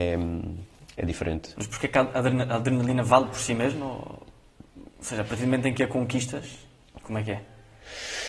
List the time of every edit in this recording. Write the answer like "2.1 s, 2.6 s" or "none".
4.9 s, 7.0 s